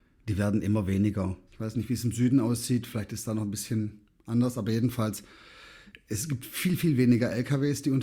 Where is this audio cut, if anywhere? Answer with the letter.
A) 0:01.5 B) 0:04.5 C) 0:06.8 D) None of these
A